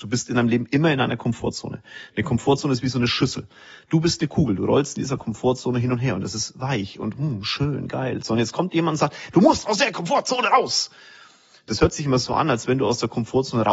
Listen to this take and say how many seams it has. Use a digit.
0